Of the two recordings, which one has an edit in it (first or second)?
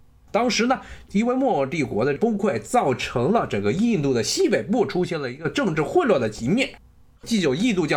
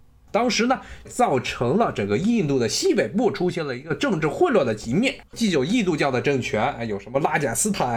second